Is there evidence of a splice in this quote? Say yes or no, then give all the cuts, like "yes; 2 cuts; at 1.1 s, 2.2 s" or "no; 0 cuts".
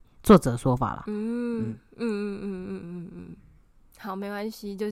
no; 0 cuts